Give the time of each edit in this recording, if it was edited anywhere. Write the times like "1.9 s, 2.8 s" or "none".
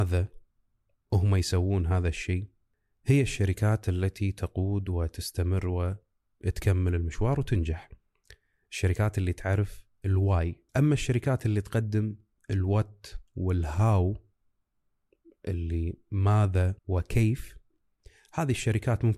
10.7 s, 16.8 s